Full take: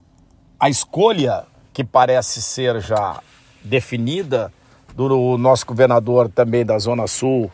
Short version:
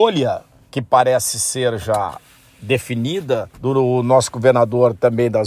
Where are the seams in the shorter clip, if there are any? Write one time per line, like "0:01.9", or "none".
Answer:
0:03.5